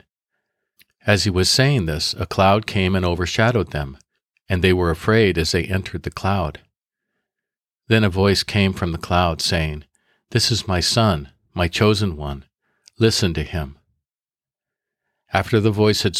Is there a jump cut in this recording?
no; 0 cuts

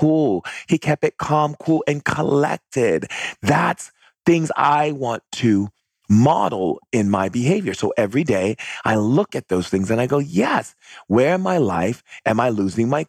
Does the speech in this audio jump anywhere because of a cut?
no; 0 cuts

